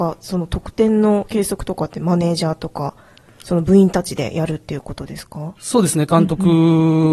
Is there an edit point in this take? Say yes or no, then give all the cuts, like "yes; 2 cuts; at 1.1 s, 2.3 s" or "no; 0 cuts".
no; 0 cuts